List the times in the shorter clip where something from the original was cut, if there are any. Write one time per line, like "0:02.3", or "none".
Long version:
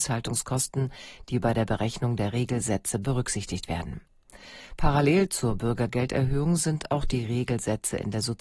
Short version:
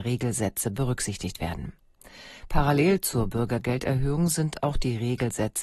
none